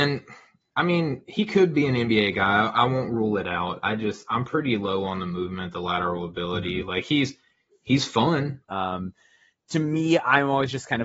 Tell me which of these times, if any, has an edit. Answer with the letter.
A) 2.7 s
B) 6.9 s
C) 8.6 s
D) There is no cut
C